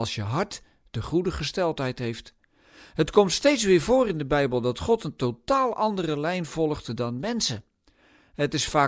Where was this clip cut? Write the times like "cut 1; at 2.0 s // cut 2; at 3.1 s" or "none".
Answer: none

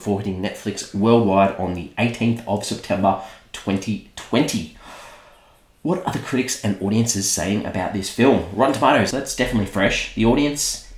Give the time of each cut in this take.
cut 1; at 9.1 s

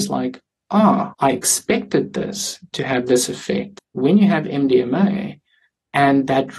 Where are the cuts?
cut 1; at 1.1 s // cut 2; at 3.8 s

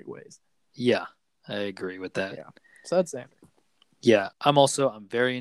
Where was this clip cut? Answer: cut 1; at 4.3 s

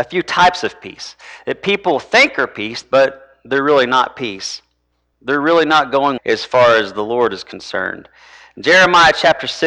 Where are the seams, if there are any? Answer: cut 1; at 2.8 s // cut 2; at 5.1 s // cut 3; at 6.2 s

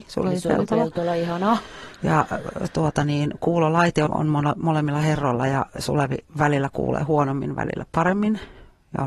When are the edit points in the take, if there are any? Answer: cut 1; at 4.1 s

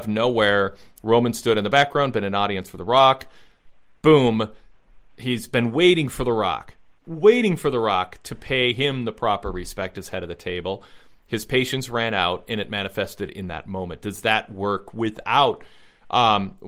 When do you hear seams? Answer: none

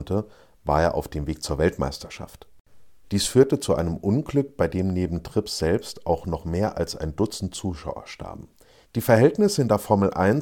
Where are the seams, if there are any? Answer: cut 1; at 3.0 s // cut 2; at 8.8 s

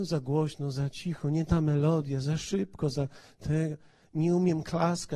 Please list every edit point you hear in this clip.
none

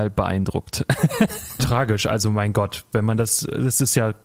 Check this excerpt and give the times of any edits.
cut 1; at 1.6 s

